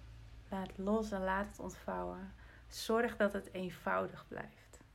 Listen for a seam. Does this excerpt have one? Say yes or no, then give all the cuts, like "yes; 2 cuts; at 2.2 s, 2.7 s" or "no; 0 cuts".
no; 0 cuts